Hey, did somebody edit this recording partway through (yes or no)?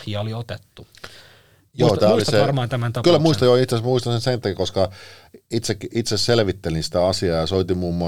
no